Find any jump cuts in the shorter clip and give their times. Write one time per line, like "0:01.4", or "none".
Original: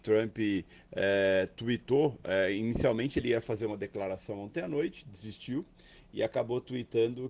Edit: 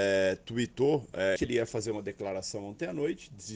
0:01.4